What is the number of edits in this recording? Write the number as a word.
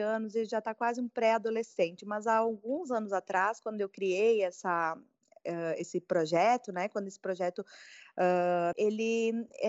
one